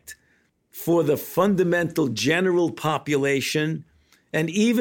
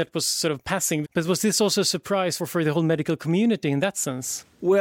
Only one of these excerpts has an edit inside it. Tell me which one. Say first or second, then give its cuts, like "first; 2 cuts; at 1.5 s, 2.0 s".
second; 2 cuts; at 1.0 s, 2.4 s